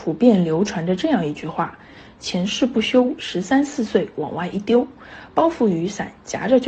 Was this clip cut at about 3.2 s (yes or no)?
yes